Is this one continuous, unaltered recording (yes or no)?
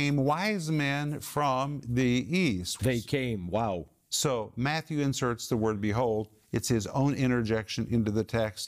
no